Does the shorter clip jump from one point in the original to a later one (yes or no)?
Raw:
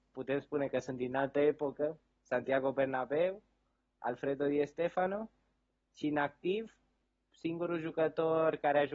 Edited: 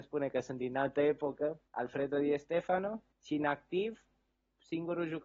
yes